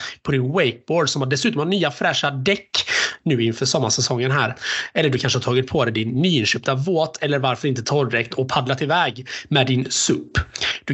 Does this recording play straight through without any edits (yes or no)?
yes